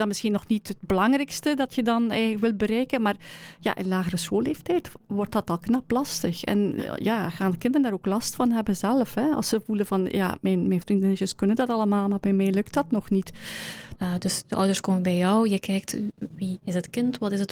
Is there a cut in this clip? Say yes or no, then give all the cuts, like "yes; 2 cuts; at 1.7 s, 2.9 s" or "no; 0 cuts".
yes; 2 cuts; at 10.8 s, 14.0 s